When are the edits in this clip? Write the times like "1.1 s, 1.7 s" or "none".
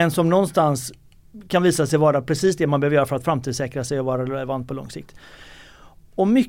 none

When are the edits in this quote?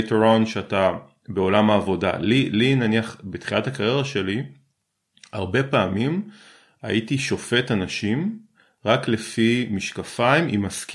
none

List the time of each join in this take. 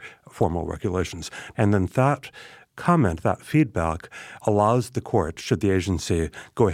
1.5 s, 4.4 s

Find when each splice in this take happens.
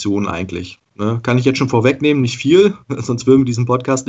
none

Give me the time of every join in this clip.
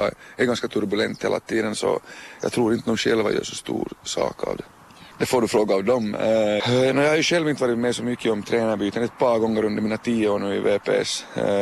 5.1 s, 6.6 s

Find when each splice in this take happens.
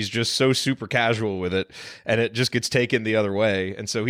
none

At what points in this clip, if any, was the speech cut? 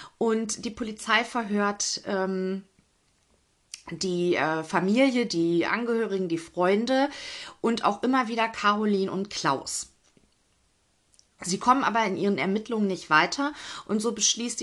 none

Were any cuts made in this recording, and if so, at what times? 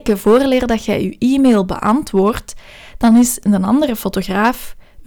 none

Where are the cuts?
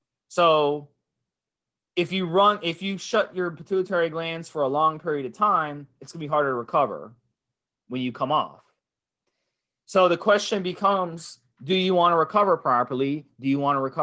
none

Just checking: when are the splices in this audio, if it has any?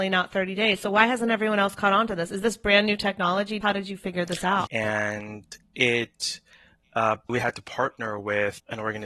3.6 s, 4.7 s, 7.3 s

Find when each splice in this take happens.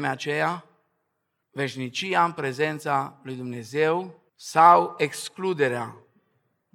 1.4 s, 4.3 s

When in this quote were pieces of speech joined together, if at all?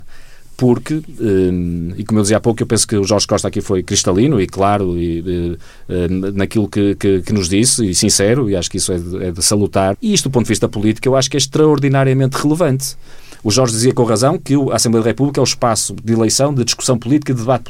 9.9 s

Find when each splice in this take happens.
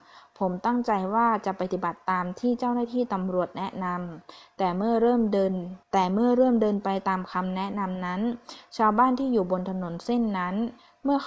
5.8 s

